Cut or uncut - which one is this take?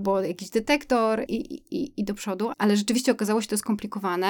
cut